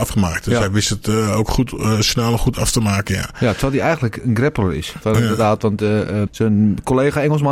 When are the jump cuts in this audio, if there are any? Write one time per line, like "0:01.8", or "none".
0:05.0
0:06.3